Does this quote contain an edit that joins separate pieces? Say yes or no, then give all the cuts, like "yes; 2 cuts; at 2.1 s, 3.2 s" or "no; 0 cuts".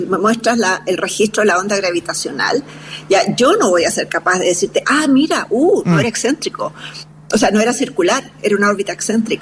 no; 0 cuts